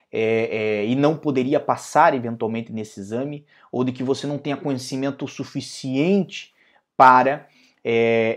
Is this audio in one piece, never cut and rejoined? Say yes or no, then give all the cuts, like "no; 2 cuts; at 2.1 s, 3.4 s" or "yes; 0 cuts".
yes; 0 cuts